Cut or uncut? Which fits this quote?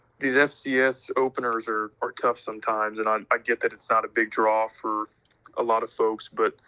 uncut